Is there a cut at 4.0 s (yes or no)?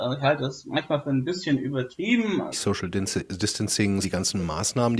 yes